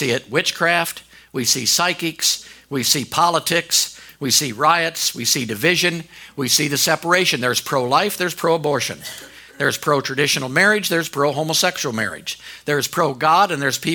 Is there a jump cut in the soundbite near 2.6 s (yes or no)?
no